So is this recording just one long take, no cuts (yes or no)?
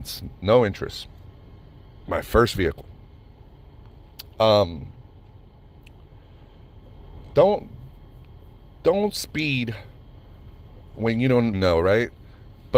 no